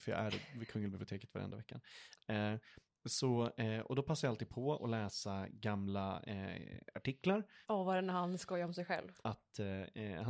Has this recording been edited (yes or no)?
yes